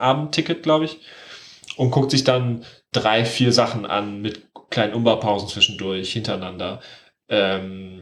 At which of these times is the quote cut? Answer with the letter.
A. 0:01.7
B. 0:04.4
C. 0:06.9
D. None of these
D